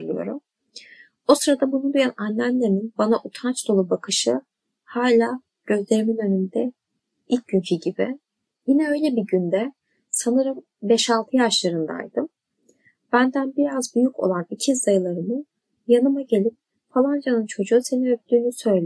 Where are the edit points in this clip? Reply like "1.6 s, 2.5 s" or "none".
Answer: 8.5 s